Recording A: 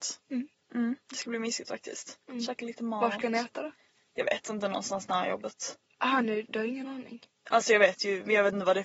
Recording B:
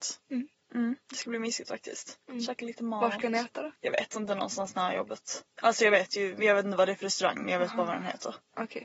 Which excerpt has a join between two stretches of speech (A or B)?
B